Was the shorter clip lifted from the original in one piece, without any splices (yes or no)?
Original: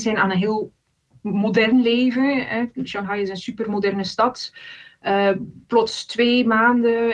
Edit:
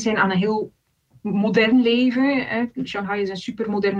yes